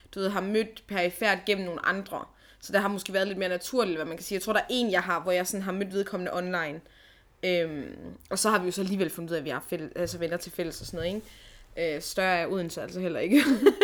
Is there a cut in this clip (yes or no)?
no